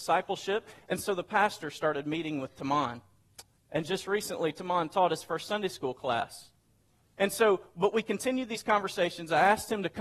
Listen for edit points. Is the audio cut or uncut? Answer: cut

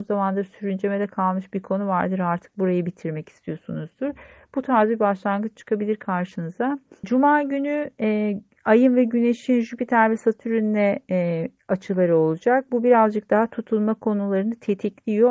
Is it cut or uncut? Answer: cut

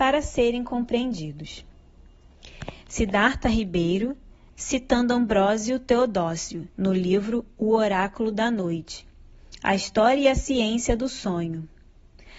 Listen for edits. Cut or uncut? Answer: cut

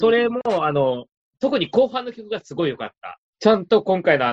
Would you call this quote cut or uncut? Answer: uncut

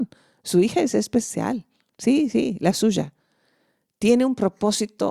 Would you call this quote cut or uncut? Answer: uncut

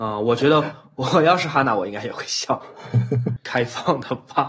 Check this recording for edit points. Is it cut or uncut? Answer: cut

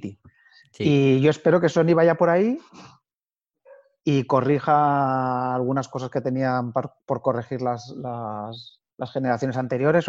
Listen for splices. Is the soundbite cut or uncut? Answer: uncut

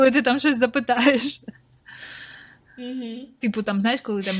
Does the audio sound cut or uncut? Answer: uncut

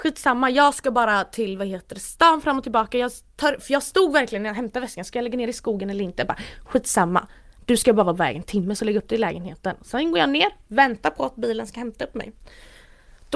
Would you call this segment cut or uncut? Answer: uncut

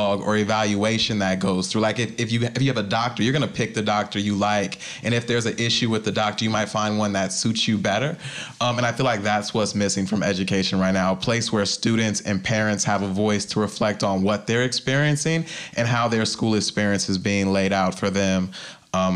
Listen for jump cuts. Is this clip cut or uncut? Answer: uncut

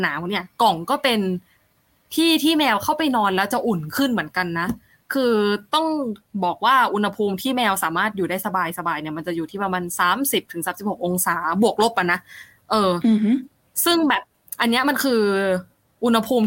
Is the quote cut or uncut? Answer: uncut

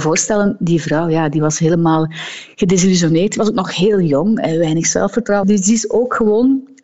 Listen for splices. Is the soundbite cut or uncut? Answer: cut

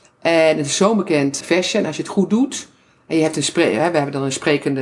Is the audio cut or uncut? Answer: cut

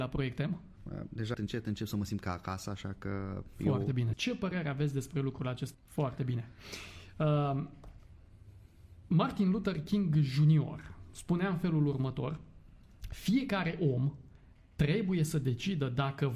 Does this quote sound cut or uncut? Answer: cut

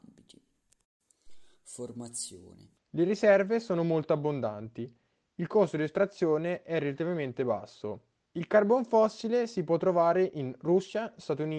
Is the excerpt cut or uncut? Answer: cut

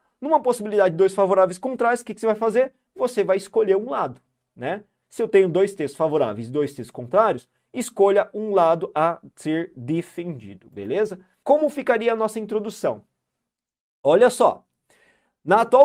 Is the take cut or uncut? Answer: uncut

